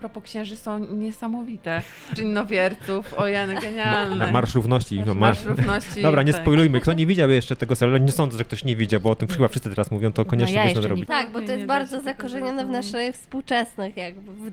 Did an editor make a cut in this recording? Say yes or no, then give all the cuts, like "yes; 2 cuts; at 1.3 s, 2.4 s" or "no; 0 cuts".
yes; 2 cuts; at 2.2 s, 11.1 s